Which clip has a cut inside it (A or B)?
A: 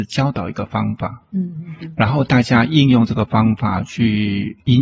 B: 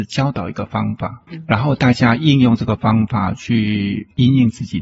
B